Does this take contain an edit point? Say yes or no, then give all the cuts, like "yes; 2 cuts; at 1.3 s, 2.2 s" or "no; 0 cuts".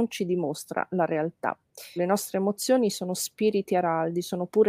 yes; 1 cut; at 2.0 s